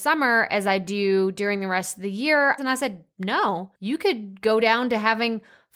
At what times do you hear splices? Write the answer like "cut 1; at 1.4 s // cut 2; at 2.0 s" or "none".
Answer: cut 1; at 2.6 s // cut 2; at 3.8 s